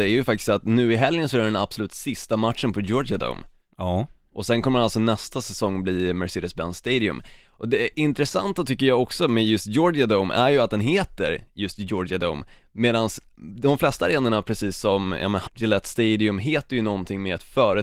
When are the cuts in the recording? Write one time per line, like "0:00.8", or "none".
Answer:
0:15.5

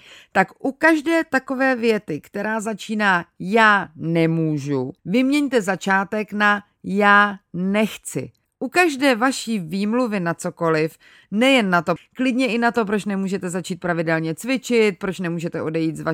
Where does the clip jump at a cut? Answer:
0:05.0
0:08.5
0:12.0

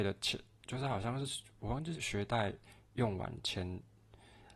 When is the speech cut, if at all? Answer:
0:01.9

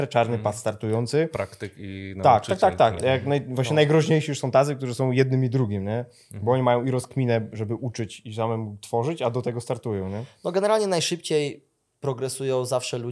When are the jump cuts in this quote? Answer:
0:03.0

